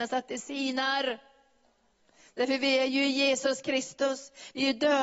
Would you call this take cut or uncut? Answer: uncut